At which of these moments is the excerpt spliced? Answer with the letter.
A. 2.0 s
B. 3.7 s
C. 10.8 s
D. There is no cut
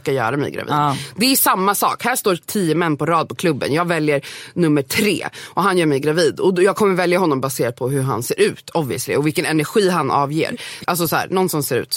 C